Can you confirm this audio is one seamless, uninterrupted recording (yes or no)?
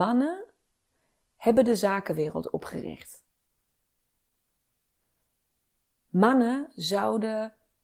yes